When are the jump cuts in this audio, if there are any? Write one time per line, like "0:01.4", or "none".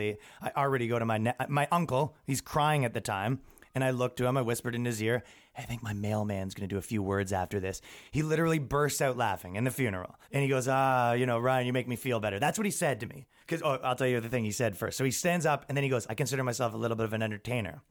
0:10.2
0:13.4
0:16.1